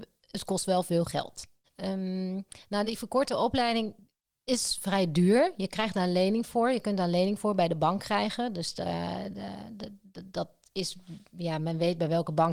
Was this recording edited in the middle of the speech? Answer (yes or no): no